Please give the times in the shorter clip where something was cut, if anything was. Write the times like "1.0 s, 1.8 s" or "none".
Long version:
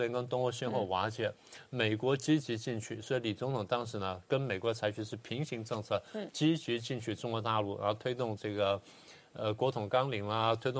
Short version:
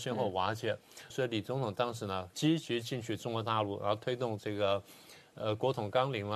1.1 s, 2.3 s